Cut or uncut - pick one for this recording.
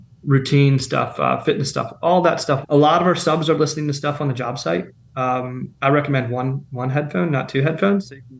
cut